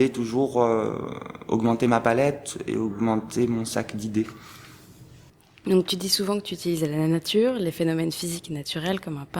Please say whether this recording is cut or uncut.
uncut